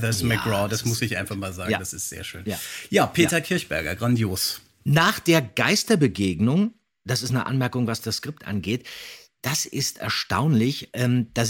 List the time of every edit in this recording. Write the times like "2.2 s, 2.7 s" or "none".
none